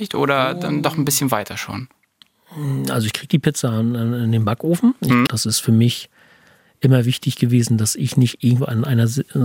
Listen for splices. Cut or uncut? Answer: cut